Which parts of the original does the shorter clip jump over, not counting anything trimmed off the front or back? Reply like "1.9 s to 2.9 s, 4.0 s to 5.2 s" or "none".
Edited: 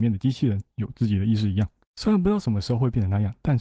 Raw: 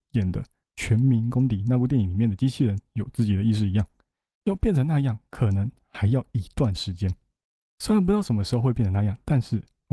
4.0 s to 7.6 s